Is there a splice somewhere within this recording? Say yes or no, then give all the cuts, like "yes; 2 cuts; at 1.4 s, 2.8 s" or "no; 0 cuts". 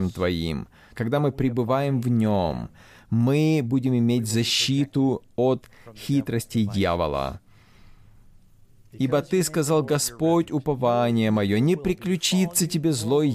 yes; 1 cut; at 0.9 s